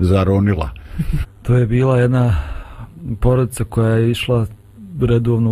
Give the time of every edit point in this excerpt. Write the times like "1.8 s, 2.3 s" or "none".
1.2 s